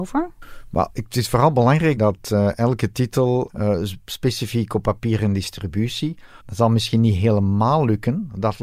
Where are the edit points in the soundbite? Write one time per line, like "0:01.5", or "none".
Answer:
0:03.5
0:06.4